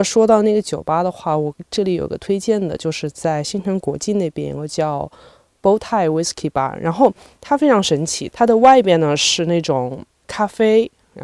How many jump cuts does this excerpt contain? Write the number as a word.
one